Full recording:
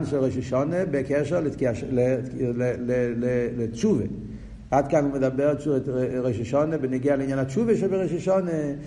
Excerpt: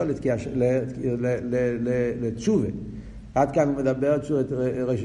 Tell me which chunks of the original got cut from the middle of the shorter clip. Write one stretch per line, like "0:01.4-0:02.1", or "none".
none

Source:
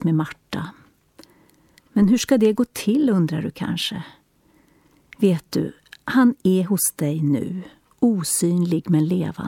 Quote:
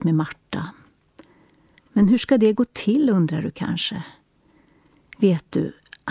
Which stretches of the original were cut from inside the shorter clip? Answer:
none

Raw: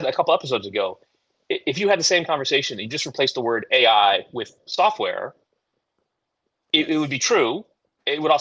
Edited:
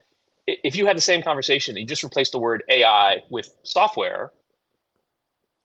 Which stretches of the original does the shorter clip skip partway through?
none

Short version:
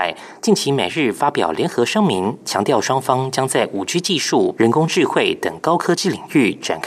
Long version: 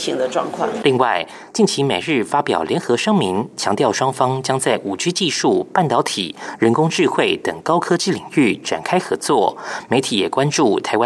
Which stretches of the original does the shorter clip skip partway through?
0:05.7-0:06.6

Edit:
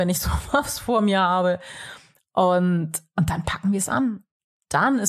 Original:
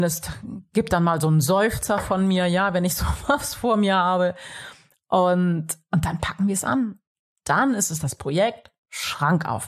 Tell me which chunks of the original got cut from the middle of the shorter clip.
none

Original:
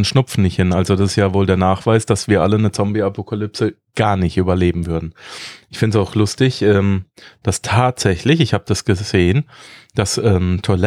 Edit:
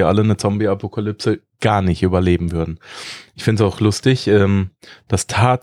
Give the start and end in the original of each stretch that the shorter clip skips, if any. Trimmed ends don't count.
none

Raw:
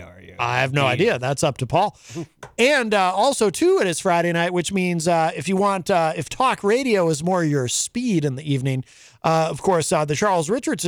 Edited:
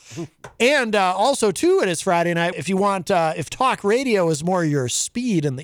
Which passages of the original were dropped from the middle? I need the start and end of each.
0:04.5-0:05.3

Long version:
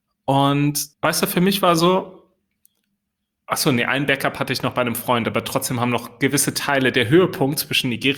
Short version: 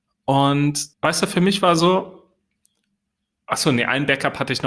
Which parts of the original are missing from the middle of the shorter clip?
none

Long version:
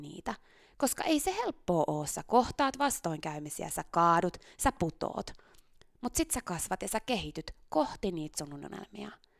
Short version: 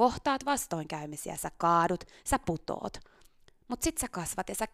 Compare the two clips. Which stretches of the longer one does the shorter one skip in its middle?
none

